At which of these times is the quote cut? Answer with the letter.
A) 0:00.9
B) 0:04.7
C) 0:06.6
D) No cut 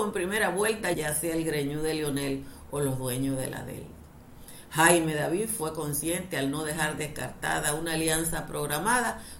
A